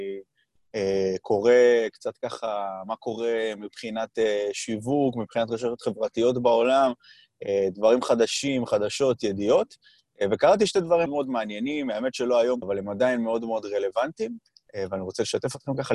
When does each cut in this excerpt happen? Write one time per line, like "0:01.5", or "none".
0:11.1
0:12.6